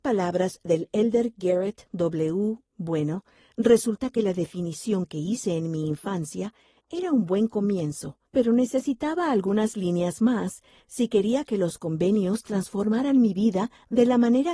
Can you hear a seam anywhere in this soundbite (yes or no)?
yes